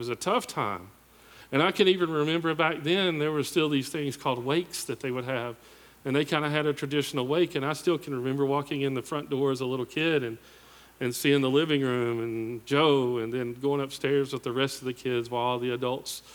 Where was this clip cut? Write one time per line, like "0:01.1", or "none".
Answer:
none